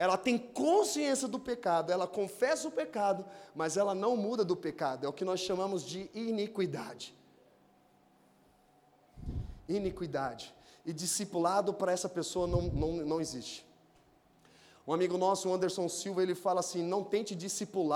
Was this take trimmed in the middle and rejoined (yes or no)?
no